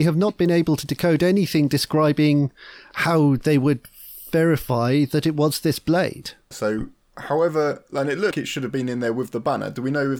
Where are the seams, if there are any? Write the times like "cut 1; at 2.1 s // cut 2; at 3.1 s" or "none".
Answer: cut 1; at 6.5 s // cut 2; at 8.3 s